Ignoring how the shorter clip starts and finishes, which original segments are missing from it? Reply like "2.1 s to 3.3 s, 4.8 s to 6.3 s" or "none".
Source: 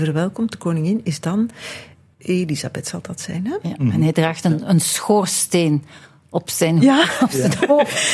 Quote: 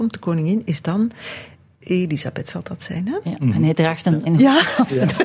4.6 s to 6.7 s